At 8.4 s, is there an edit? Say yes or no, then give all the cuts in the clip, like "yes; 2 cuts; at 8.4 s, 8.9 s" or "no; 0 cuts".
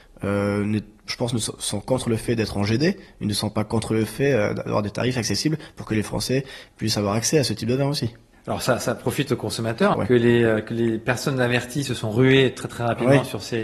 no; 1 cut; at 9.9 s